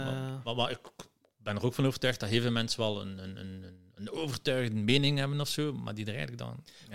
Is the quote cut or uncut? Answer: uncut